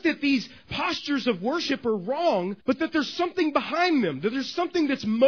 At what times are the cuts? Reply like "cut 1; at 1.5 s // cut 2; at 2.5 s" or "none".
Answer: cut 1; at 2.6 s